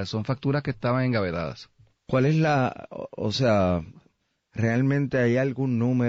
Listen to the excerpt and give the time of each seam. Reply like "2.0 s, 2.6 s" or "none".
1.9 s